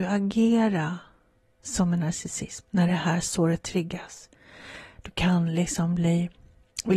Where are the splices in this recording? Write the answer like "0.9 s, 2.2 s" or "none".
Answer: none